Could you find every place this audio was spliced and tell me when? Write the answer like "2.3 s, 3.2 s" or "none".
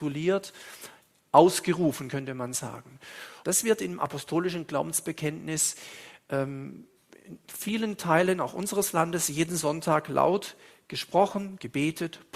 3.4 s